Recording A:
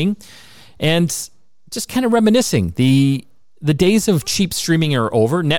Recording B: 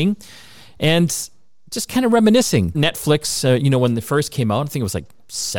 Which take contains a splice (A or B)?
B